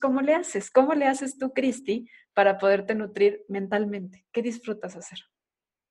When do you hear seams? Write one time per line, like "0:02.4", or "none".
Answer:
none